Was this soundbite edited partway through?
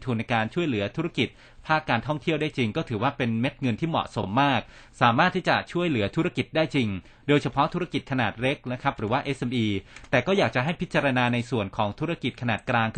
no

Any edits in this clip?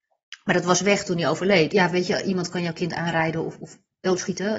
yes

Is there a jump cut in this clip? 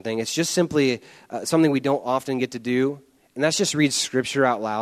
no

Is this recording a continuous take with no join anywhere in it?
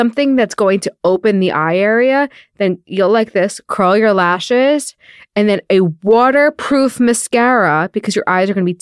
yes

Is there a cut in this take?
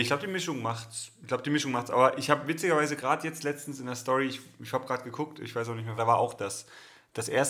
yes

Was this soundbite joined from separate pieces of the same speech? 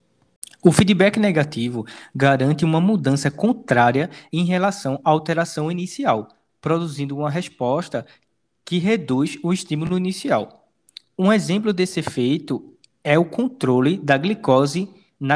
no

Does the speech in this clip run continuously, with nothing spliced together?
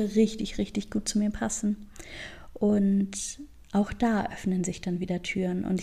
yes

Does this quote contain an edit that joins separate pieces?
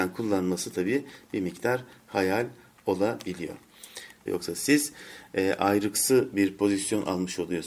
yes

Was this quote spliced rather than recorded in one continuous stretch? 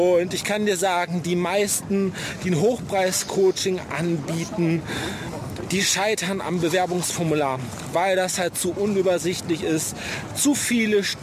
no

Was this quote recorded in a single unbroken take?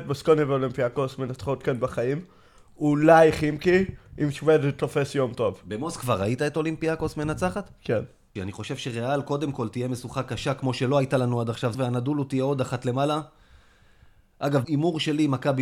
no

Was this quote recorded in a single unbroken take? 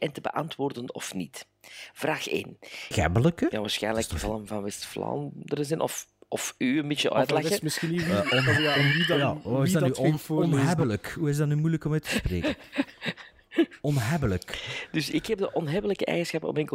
no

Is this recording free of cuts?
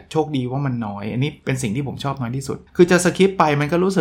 no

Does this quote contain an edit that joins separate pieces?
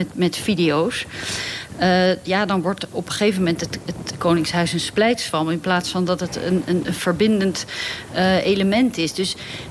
no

